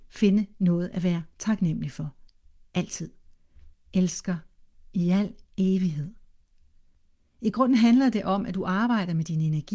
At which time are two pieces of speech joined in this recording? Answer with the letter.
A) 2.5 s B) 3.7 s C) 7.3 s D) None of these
B